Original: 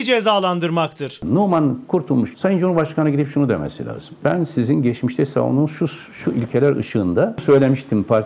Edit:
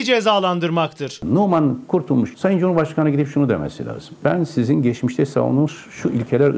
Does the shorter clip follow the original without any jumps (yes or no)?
no